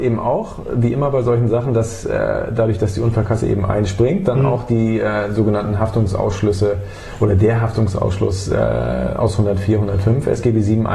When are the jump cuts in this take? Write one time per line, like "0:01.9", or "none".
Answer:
none